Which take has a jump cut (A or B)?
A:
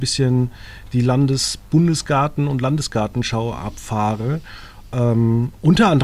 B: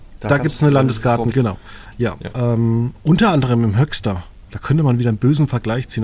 B